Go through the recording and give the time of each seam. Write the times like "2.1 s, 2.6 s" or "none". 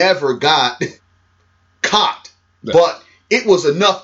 1.0 s